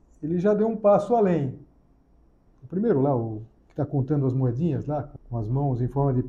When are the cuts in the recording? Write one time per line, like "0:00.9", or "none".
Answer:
0:02.5
0:05.2